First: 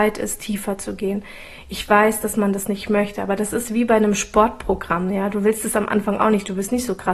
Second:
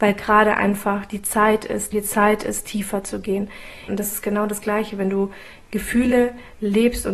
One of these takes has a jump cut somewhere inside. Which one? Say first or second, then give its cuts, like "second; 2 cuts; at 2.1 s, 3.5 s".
second; 2 cuts; at 1.9 s, 3.9 s